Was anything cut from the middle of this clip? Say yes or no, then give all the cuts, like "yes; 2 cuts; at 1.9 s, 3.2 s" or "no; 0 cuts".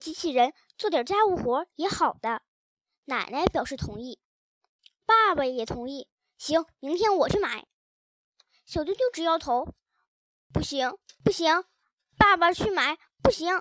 no; 0 cuts